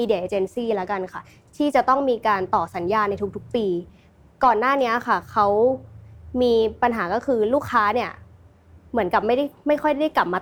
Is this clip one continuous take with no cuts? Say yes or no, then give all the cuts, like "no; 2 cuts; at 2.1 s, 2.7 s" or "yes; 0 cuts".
yes; 0 cuts